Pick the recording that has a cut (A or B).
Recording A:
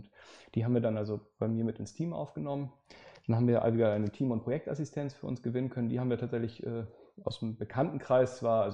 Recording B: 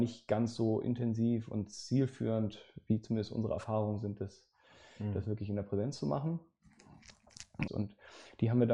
B